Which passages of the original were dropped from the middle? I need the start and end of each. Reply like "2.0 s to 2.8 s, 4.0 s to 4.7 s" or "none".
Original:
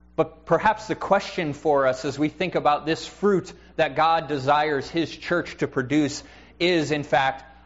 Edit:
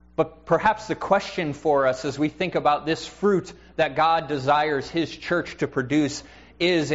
none